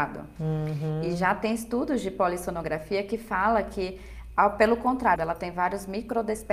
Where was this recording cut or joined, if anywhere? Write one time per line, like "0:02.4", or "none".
0:05.2